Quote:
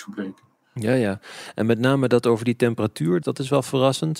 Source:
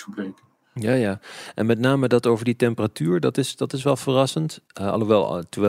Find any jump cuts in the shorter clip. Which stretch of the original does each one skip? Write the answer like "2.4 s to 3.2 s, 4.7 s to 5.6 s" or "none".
3.2 s to 3.6 s